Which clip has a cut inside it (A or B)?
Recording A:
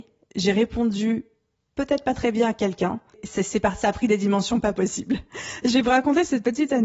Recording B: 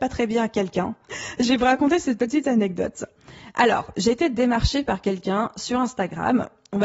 B